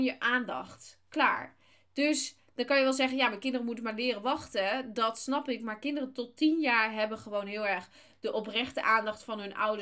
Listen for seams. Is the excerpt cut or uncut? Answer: uncut